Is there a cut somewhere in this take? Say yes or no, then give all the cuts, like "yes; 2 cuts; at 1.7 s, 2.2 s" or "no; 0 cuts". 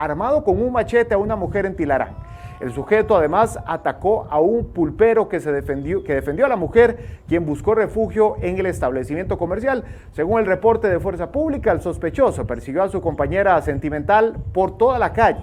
no; 0 cuts